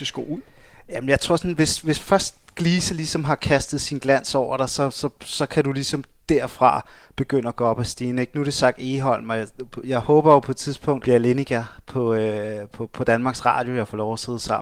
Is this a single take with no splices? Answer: no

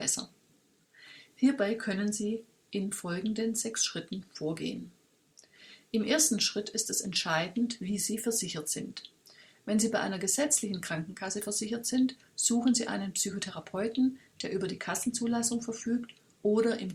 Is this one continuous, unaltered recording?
yes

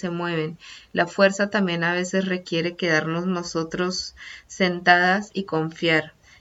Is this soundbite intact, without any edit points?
yes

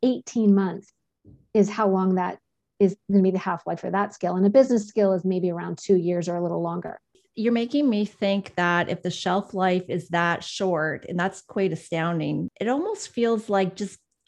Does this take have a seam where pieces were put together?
no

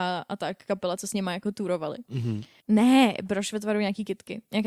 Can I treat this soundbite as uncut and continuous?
no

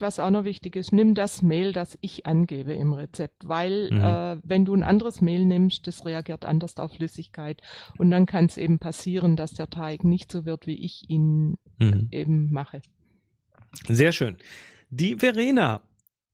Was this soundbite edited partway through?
no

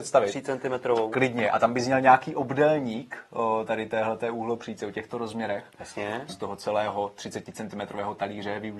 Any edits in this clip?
yes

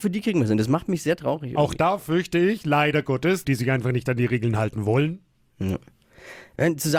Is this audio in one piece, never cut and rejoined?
no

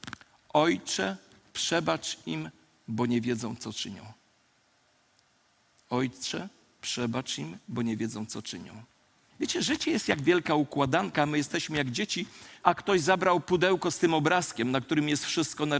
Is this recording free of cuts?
no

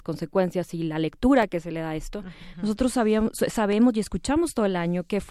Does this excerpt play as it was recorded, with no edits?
no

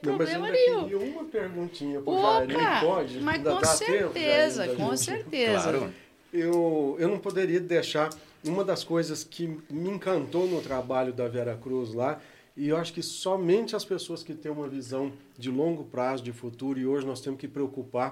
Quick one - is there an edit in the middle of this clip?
no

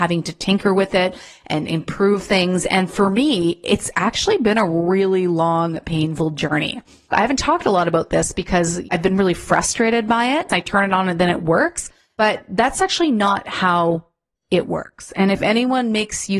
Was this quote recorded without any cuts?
no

